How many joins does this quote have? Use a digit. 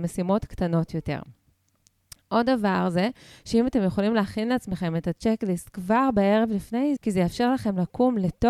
1